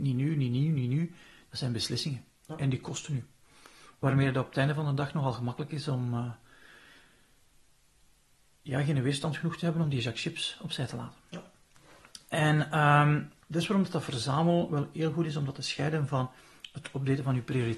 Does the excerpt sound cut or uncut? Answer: cut